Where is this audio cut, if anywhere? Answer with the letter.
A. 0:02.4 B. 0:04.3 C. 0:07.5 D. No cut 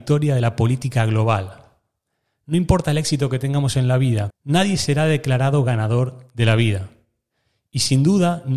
B